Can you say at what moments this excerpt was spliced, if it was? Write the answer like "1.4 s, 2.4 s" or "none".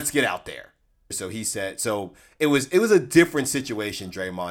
1.1 s